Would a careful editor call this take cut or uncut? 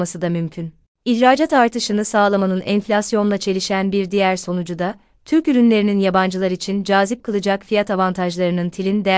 uncut